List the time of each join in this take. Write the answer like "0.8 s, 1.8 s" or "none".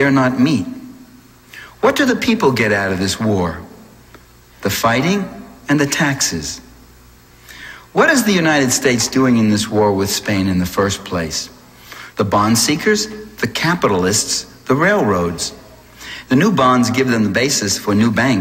12.1 s, 16.3 s